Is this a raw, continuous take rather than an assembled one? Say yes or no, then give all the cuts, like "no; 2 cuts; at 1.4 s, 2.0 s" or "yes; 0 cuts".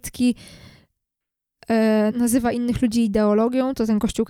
no; 1 cut; at 2.1 s